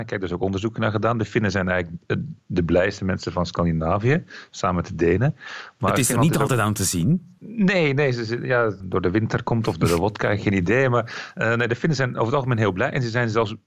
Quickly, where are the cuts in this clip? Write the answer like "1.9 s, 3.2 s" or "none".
8.8 s

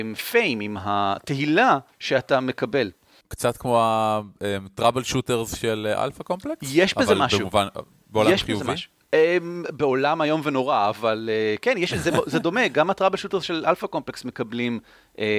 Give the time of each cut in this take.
none

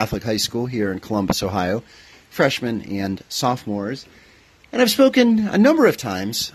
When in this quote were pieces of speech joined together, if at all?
none

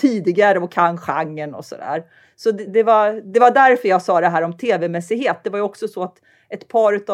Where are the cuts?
2.7 s

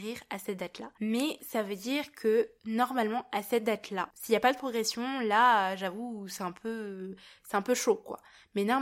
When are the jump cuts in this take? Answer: none

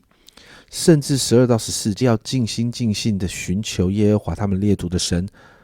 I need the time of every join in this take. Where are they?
2.0 s

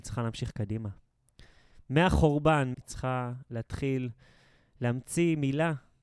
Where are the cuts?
2.7 s

